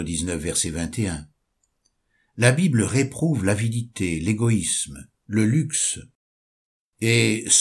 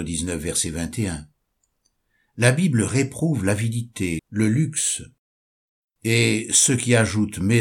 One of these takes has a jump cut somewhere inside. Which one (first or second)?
second